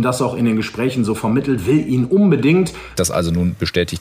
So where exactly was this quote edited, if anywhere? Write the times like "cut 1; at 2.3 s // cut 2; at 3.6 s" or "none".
cut 1; at 3.0 s